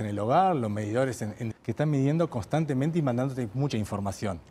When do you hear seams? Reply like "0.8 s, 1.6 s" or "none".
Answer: 1.5 s

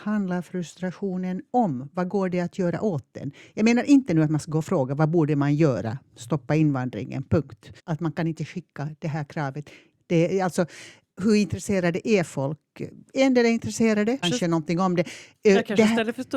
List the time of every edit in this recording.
7.8 s, 9.9 s, 14.2 s

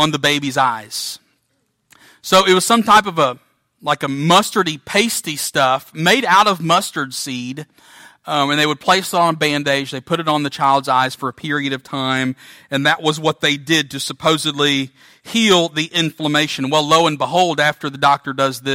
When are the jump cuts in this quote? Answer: none

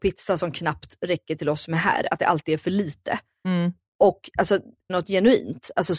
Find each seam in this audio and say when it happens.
4.9 s

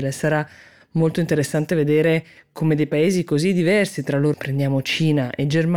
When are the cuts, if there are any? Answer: 4.3 s

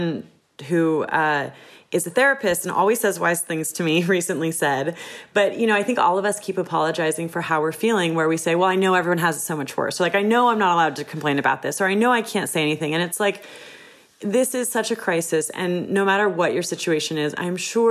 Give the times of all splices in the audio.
none

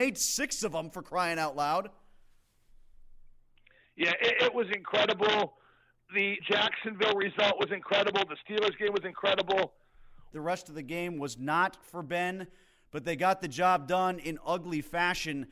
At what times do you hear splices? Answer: 6.4 s, 10.3 s

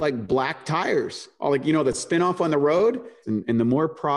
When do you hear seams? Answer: 3.2 s

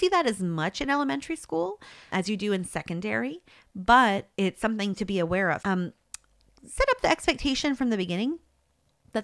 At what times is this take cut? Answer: 2.1 s, 5.6 s

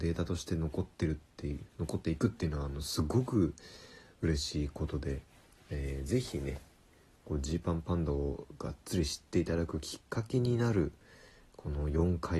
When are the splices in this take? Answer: none

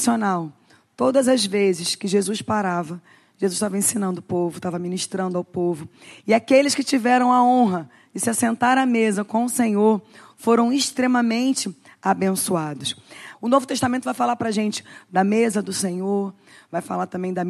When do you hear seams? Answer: 13.3 s

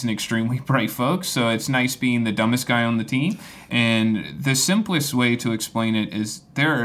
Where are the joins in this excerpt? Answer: 3.7 s

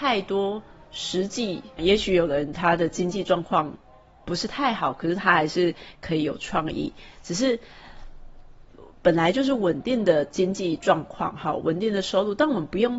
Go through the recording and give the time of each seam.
1.8 s

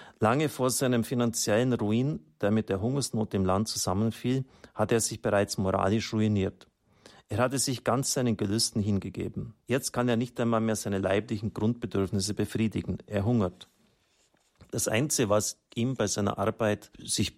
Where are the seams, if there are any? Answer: 9.6 s

